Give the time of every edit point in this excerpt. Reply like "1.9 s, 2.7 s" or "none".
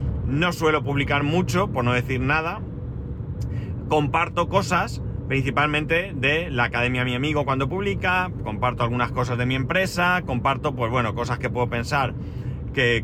none